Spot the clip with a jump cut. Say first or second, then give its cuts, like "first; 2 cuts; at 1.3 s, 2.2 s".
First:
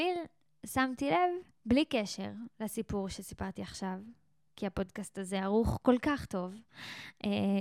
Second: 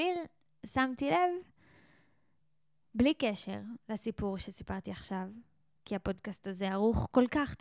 first; 1 cut; at 1.5 s